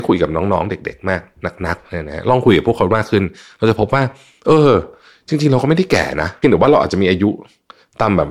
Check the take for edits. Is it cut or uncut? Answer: uncut